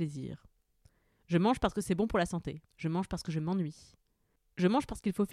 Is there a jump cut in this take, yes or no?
yes